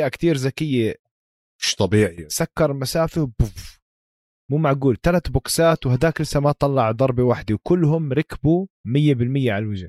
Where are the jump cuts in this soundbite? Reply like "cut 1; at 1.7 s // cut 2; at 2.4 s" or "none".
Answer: cut 1; at 8.7 s